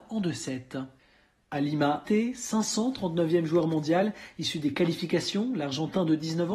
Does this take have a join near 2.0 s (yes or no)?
yes